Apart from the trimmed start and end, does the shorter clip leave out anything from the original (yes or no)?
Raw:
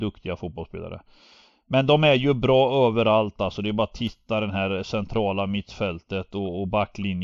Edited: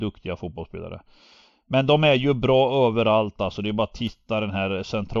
no